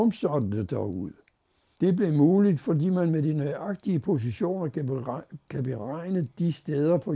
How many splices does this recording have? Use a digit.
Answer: 1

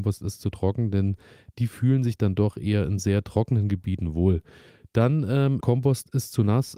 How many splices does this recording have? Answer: 1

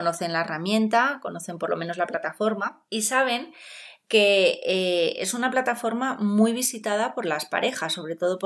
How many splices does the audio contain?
0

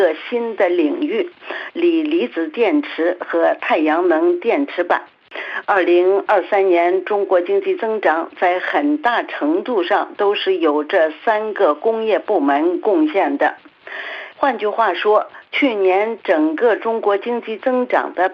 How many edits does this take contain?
2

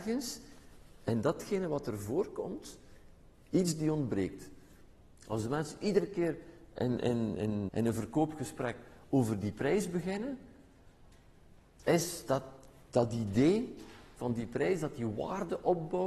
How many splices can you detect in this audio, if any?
1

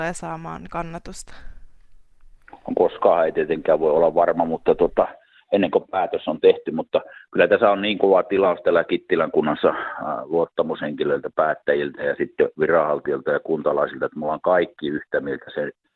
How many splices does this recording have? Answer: 0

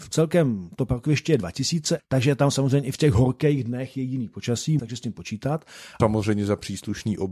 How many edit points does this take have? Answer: 3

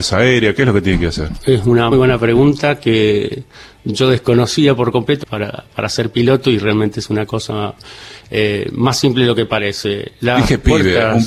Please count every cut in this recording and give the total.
2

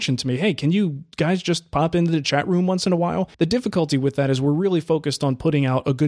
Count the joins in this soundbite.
1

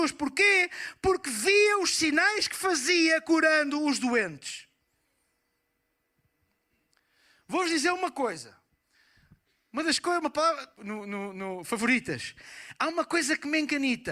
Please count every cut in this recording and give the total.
1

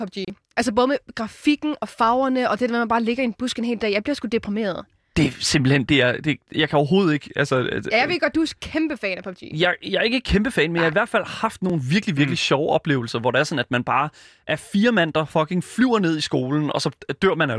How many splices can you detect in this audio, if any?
0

